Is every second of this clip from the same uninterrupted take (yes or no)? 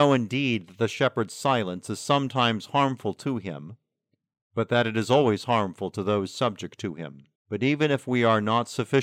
no